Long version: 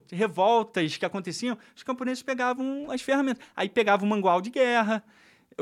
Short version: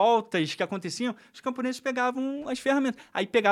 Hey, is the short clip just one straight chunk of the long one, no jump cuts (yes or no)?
yes